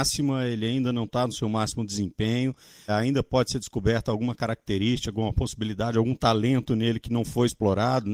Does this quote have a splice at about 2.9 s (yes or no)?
yes